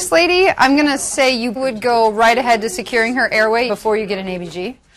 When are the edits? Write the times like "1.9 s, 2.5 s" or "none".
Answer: 1.6 s, 3.7 s